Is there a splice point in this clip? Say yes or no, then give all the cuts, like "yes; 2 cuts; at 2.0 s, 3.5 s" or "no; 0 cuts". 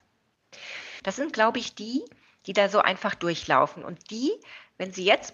yes; 1 cut; at 1.0 s